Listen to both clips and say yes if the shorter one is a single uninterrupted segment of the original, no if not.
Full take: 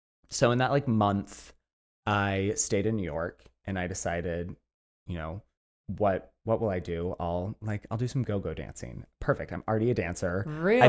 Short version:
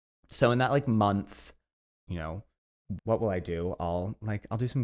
no